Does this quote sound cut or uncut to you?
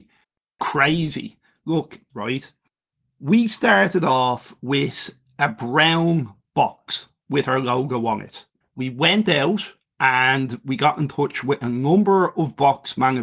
cut